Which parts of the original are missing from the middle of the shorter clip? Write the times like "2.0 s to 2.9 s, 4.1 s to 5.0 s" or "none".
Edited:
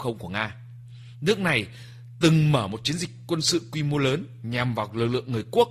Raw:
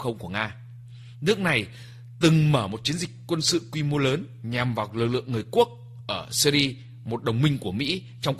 none